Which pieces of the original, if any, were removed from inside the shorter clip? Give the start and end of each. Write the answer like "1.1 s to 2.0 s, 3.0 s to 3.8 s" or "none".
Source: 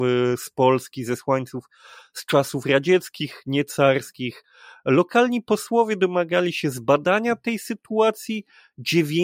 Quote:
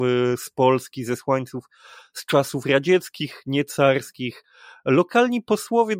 none